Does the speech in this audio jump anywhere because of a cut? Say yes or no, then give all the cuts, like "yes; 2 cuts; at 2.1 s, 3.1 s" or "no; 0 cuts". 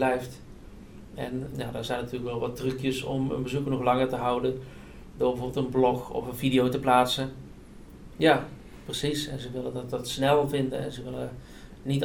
yes; 2 cuts; at 1.5 s, 8.1 s